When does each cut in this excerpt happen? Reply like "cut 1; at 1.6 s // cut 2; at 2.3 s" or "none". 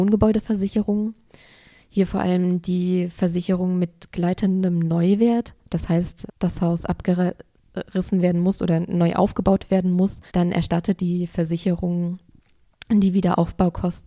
cut 1; at 6.3 s // cut 2; at 10.3 s